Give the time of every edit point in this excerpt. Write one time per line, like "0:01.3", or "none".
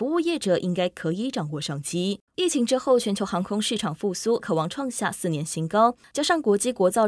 0:02.3
0:04.4